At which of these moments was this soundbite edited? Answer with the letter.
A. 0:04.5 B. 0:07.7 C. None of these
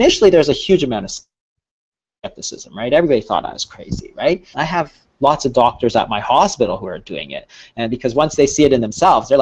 A